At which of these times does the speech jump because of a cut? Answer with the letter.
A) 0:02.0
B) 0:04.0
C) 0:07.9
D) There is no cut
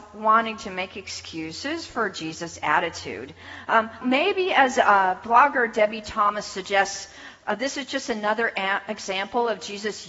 B